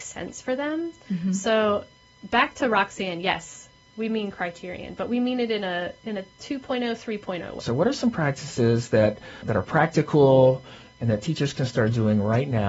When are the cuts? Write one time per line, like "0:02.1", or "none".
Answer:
0:07.6
0:09.4